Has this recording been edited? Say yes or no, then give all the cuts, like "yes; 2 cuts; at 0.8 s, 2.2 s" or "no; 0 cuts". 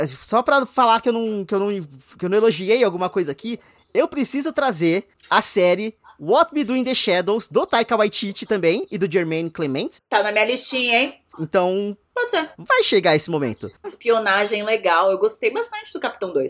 yes; 3 cuts; at 11.3 s, 12.5 s, 13.8 s